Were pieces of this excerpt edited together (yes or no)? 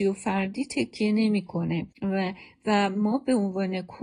yes